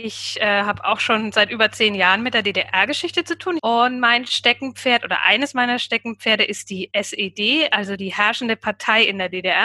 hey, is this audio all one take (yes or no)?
no